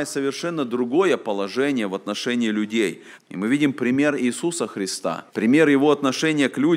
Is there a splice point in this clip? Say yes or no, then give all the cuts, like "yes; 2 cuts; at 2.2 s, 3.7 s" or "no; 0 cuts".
yes; 2 cuts; at 3.2 s, 5.3 s